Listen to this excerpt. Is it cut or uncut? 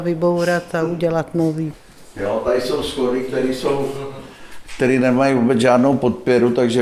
uncut